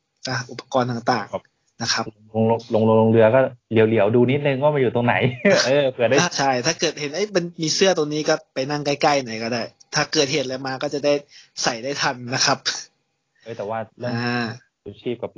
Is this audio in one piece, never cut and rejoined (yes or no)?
no